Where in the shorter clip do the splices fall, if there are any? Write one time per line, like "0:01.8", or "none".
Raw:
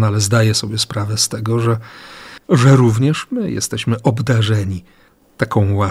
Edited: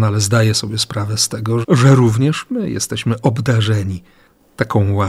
0:01.6